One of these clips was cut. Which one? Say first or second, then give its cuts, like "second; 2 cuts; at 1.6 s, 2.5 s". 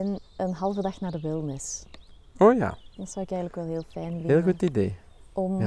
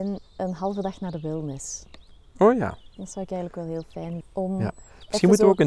second; 1 cut; at 4.2 s